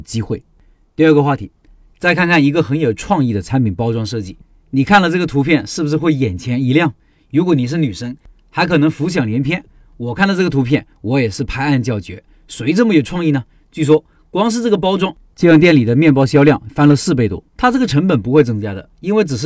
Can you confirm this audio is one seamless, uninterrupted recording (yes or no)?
no